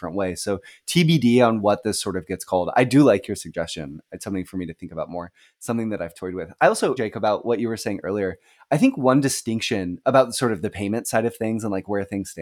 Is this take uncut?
no; 1 cut; at 7.0 s

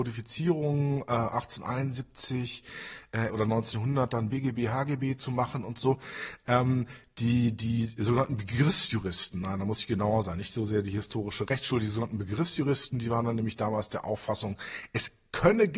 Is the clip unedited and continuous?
no; 1 cut; at 3.3 s

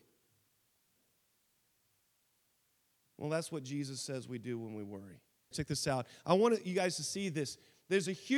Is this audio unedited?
no; 1 cut; at 5.5 s

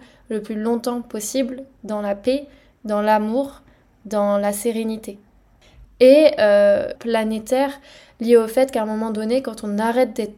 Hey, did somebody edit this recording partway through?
yes; 2 cuts; at 5.8 s, 7.0 s

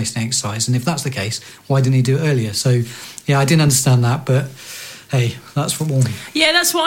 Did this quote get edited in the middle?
no; 0 cuts

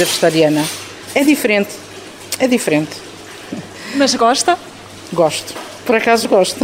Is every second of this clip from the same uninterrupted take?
yes; 0 cuts

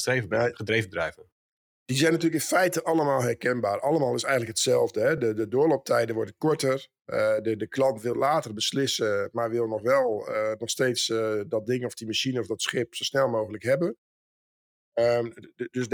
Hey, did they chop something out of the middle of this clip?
no; 0 cuts

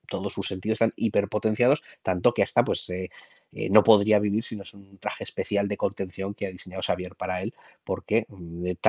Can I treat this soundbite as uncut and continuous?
yes; 0 cuts

